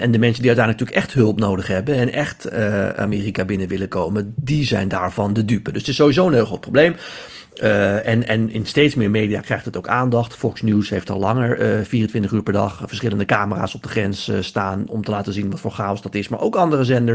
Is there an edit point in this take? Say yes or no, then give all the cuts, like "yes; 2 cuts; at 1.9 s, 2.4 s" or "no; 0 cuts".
no; 0 cuts